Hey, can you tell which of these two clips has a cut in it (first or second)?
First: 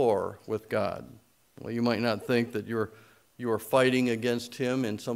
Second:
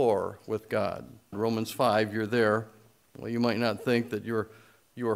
second